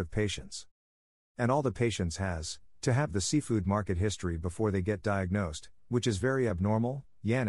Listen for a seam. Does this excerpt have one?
yes; 1 cut; at 2.7 s

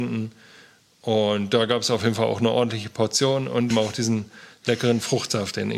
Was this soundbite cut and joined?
yes; 1 cut; at 3.7 s

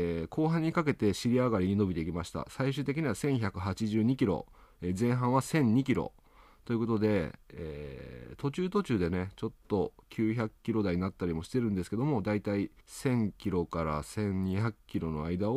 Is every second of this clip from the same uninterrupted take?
no; 1 cut; at 12.8 s

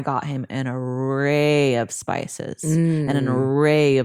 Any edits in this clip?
no; 0 cuts

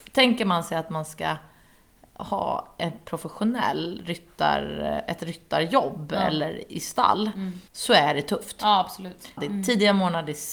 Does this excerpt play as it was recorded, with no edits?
no; 2 cuts; at 7.7 s, 9.4 s

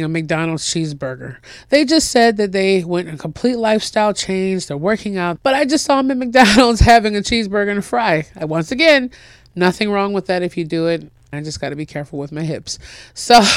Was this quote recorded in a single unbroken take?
no; 2 cuts; at 5.4 s, 11.3 s

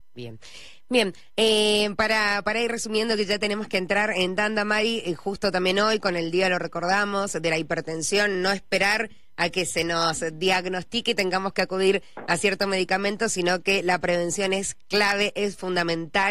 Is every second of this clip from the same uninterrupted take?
yes; 0 cuts

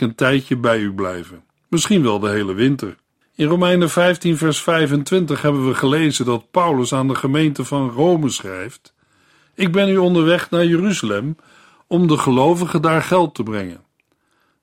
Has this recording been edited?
yes; 1 cut; at 3.2 s

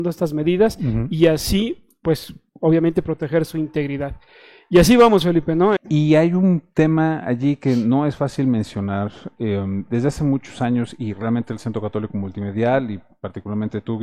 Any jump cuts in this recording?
yes; 1 cut; at 5.8 s

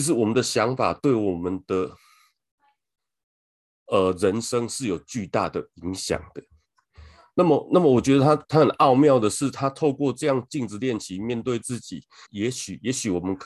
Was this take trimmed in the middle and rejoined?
yes; 1 cut; at 12.2 s

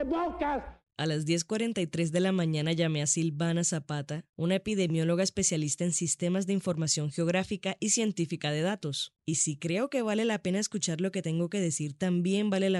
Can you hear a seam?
yes; 1 cut; at 9.2 s

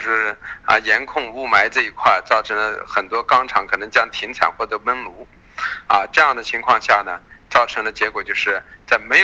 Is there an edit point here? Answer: no; 0 cuts

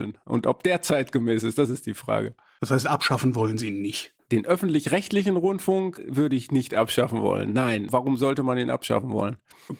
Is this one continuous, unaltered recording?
yes; 0 cuts

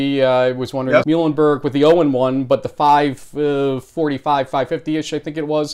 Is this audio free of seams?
no; 1 cut; at 1.0 s

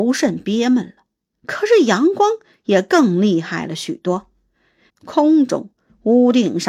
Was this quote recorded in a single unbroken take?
no; 1 cut; at 4.9 s

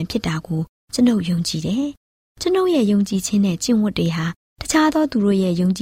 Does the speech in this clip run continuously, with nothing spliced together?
yes; 0 cuts

